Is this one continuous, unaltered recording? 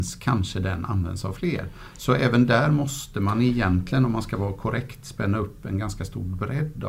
yes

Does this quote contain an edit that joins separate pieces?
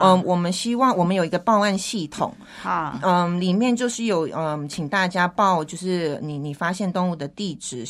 no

